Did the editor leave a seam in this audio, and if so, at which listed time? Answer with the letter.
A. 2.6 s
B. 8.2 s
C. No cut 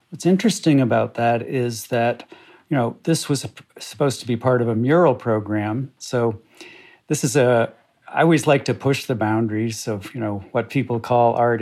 C